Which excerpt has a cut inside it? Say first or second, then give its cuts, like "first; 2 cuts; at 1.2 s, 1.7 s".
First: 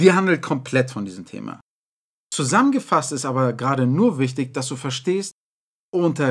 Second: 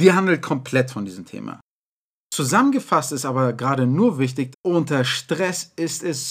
second; 1 cut; at 4.5 s